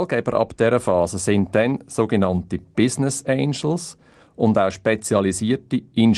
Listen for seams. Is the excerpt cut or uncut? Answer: uncut